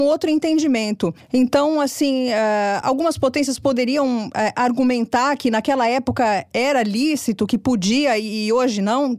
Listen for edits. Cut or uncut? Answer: uncut